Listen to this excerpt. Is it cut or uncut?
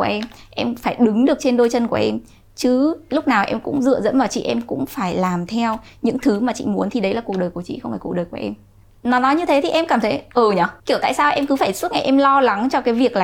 cut